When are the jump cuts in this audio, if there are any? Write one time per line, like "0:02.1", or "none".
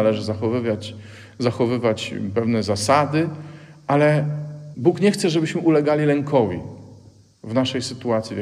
none